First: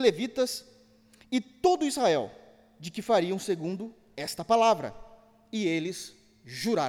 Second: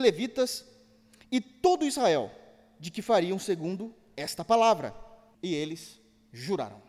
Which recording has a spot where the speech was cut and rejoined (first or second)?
second